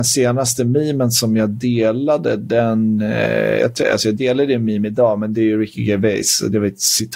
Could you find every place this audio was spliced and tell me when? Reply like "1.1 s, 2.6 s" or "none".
none